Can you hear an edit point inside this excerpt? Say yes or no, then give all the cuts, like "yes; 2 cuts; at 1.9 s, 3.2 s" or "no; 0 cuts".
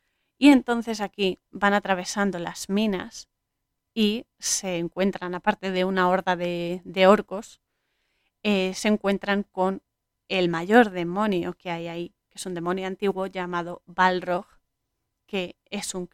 no; 0 cuts